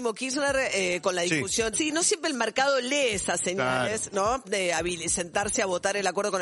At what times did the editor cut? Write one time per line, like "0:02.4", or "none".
0:01.7
0:04.4